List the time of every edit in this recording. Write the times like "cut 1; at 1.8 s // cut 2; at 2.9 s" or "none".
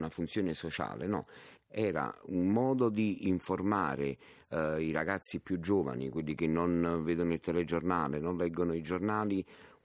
cut 1; at 1.6 s